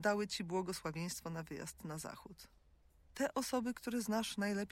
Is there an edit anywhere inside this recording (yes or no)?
no